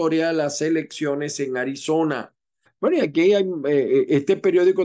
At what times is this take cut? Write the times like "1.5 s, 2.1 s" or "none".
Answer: 2.7 s